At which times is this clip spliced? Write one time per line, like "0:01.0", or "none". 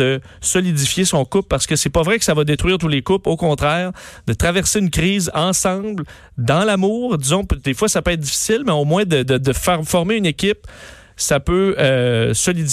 none